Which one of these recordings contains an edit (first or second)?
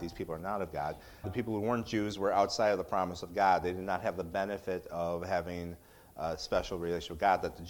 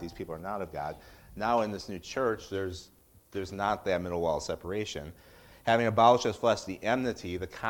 first